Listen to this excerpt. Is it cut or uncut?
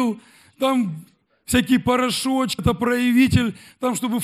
cut